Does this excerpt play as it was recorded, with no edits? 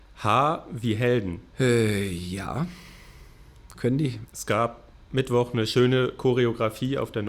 no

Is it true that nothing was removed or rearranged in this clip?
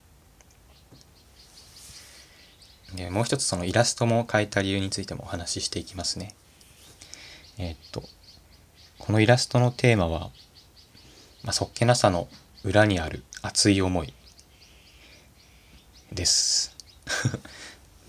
yes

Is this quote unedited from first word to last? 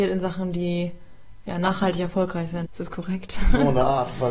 no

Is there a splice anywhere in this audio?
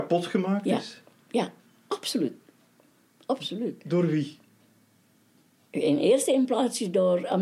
no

